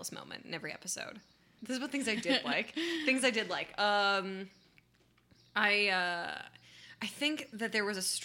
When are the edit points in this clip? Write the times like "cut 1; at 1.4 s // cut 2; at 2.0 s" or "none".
cut 1; at 1.6 s